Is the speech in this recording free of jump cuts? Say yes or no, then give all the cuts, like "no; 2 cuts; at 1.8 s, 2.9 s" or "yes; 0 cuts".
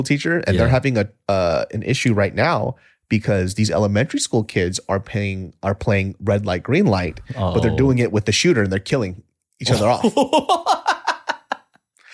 yes; 0 cuts